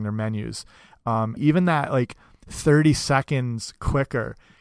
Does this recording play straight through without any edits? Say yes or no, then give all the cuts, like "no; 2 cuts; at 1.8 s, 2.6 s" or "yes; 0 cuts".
no; 1 cut; at 1.4 s